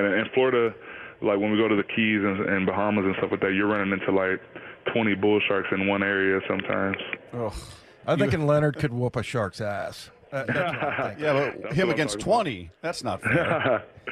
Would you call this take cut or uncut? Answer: uncut